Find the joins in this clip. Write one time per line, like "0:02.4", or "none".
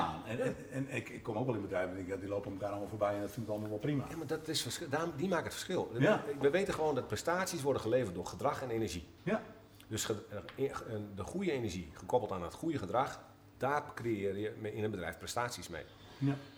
none